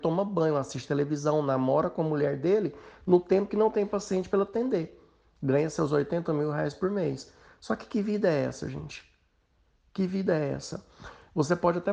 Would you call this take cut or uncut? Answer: uncut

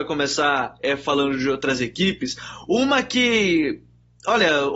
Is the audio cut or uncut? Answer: uncut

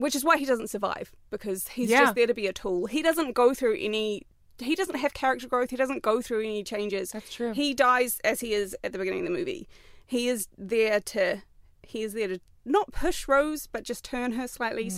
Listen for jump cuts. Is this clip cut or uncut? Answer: uncut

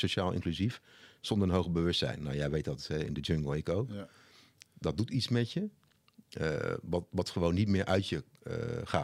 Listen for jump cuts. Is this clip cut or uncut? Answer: uncut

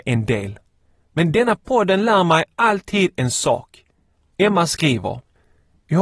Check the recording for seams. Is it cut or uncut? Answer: cut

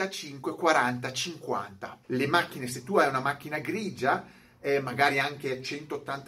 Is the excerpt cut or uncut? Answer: cut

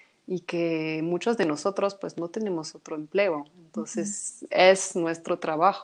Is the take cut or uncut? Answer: uncut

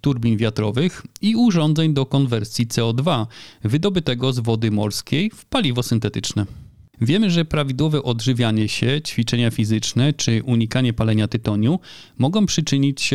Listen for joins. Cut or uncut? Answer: cut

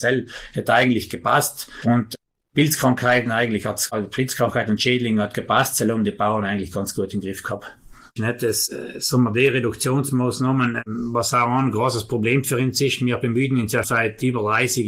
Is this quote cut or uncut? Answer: cut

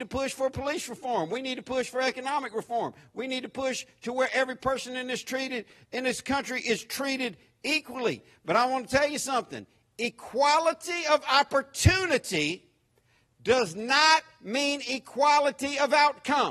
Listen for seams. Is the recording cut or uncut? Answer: uncut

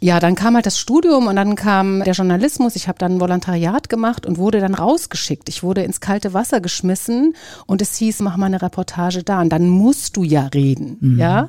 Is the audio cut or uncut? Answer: cut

